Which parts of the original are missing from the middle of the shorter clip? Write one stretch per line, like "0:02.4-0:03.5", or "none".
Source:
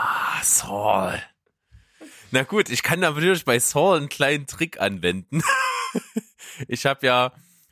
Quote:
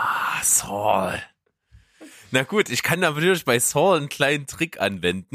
none